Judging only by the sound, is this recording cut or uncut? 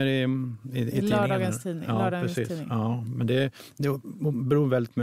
uncut